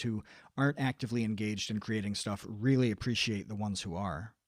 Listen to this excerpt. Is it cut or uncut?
uncut